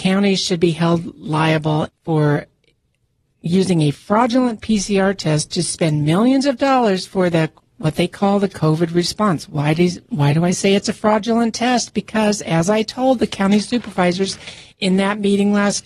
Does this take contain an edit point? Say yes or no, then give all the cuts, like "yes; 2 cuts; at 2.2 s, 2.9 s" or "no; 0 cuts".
yes; 1 cut; at 1.9 s